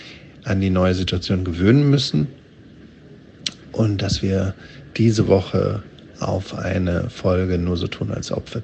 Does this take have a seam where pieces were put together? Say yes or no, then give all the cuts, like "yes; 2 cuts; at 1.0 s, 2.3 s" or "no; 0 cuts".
no; 0 cuts